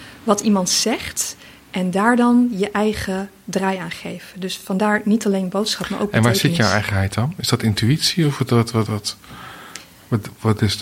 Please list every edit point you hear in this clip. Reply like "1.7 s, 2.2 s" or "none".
8.9 s